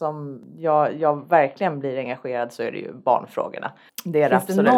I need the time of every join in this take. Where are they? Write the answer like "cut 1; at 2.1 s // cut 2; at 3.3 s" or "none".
cut 1; at 3.9 s